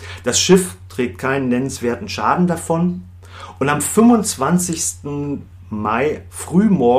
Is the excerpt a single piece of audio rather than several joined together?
yes; 0 cuts

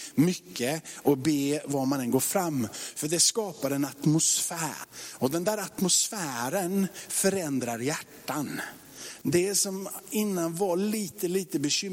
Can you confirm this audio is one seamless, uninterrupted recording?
no; 1 cut; at 9.2 s

